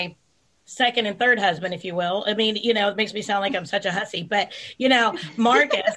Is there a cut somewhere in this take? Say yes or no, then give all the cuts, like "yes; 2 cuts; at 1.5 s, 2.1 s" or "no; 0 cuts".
no; 0 cuts